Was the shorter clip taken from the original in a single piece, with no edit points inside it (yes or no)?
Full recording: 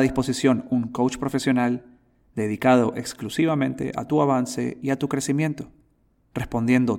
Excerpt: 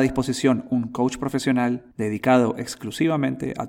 no